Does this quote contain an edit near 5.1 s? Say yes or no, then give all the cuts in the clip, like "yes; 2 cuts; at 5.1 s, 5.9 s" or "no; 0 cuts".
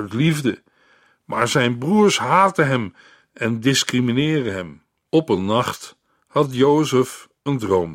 yes; 1 cut; at 5.1 s